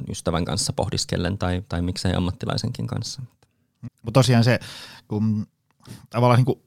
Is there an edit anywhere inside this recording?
yes; 1 cut; at 3.9 s

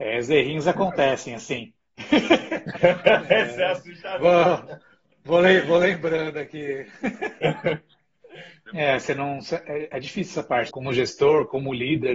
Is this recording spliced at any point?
yes; 2 cuts; at 8.7 s, 10.7 s

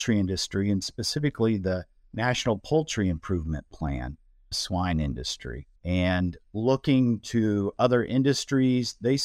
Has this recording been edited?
yes; 2 cuts; at 4.5 s, 5.8 s

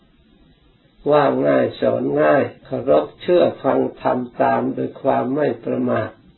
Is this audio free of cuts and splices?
no; 1 cut; at 2.6 s

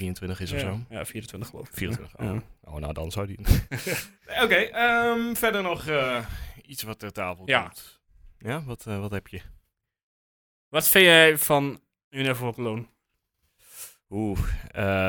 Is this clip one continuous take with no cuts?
yes; 0 cuts

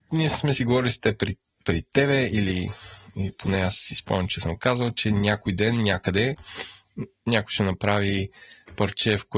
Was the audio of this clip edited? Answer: no; 0 cuts

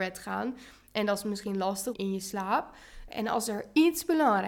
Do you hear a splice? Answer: yes; 2 cuts; at 1.9 s, 3.1 s

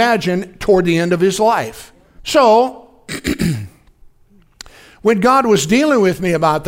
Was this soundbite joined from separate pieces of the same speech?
yes; 1 cut; at 2.2 s

